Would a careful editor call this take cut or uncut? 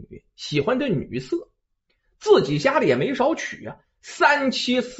uncut